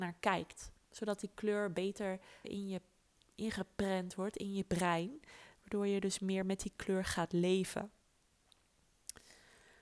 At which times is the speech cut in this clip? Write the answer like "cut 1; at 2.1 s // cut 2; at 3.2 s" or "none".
cut 1; at 2.4 s